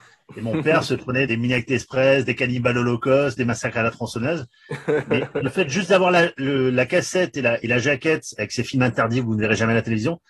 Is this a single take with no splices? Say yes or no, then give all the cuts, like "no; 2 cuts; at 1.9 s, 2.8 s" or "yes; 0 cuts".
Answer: no; 1 cut; at 1.3 s